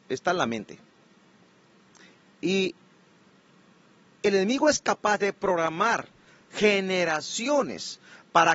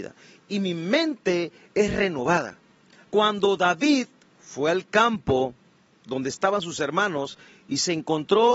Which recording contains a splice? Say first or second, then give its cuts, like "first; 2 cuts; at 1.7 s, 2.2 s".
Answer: second; 1 cut; at 3.1 s